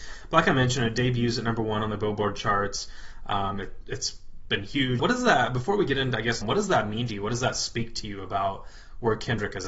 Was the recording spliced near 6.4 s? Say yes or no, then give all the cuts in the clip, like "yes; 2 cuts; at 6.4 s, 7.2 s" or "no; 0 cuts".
yes; 2 cuts; at 5.0 s, 6.4 s